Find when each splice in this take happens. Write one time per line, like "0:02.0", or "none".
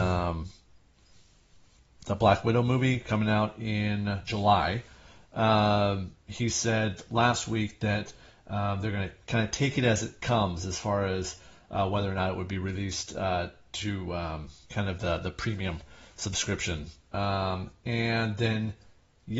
0:04.3
0:06.2
0:14.6